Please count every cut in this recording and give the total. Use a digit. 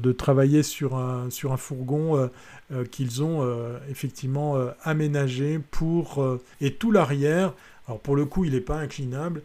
1